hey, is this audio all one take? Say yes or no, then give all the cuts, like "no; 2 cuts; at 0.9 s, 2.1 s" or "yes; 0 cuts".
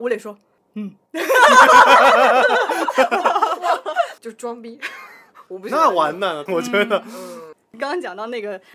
no; 3 cuts; at 4.2 s, 6.5 s, 7.5 s